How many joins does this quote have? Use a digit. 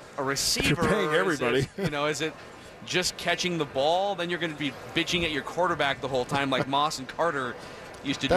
1